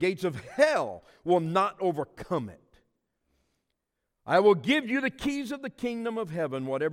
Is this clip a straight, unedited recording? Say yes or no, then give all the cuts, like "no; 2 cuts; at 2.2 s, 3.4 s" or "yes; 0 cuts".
yes; 0 cuts